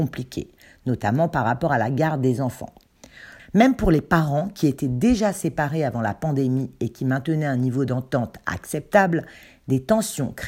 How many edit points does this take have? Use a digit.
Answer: 1